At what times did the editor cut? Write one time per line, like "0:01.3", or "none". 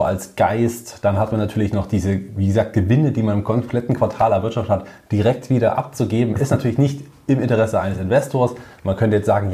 none